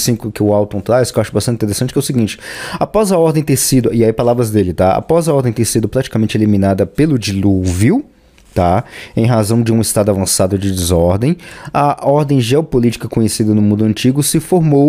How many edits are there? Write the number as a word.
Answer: zero